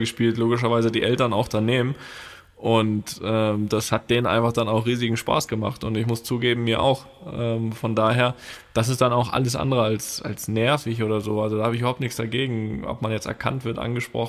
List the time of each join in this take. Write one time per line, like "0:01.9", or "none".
none